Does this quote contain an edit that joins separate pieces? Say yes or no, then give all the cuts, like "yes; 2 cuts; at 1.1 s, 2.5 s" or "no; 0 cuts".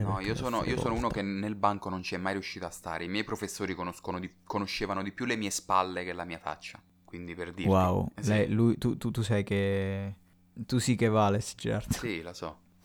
no; 0 cuts